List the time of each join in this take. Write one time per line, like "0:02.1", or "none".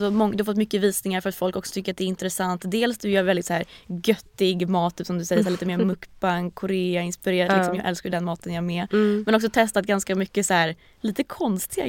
none